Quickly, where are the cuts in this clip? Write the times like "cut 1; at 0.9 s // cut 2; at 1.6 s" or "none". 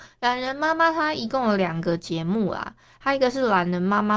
none